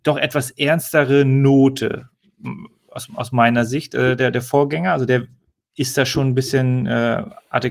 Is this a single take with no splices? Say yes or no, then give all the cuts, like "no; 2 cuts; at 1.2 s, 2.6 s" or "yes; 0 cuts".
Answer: yes; 0 cuts